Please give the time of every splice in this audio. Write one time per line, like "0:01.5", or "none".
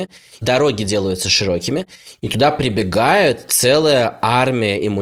none